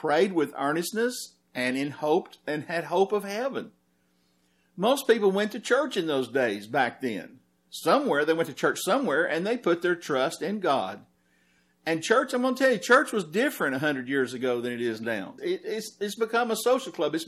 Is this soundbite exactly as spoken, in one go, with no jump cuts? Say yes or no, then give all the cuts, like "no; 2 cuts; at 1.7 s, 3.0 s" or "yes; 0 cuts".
no; 1 cut; at 15.4 s